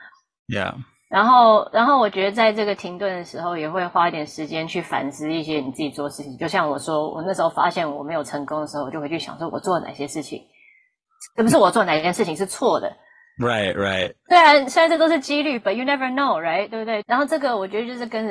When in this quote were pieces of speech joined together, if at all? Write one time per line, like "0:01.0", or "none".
0:17.0